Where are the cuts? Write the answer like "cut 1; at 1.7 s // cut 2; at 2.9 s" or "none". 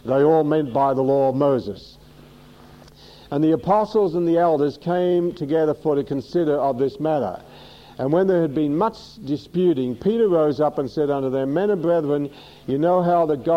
none